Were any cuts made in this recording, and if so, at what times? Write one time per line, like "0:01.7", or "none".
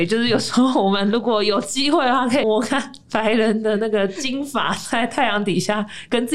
0:02.4

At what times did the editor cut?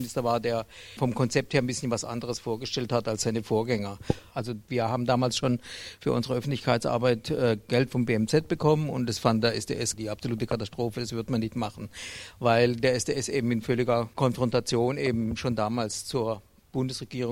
0:04.3

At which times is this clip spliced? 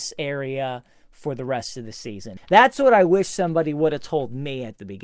0:02.4

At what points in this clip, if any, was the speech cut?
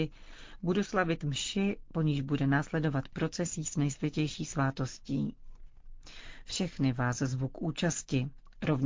none

